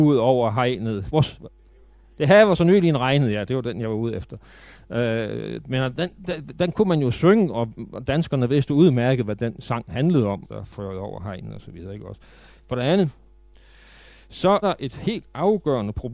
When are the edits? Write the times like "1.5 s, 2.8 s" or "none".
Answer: 10.4 s, 12.6 s, 14.6 s